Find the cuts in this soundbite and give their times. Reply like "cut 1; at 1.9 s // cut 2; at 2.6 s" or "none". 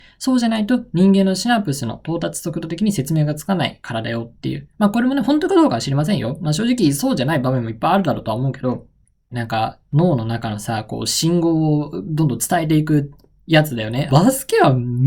cut 1; at 9.3 s // cut 2; at 14.1 s